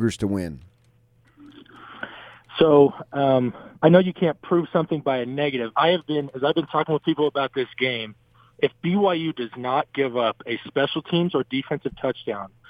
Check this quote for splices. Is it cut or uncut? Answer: cut